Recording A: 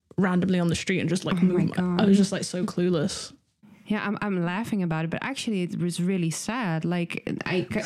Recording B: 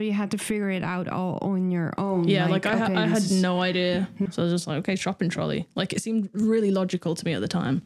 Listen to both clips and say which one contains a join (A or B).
B